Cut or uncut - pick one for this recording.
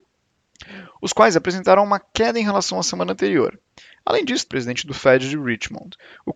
cut